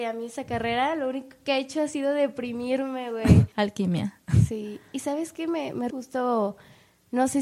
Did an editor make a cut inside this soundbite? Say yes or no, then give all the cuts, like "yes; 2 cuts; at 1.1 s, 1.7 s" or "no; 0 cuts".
yes; 2 cuts; at 3.5 s, 5.9 s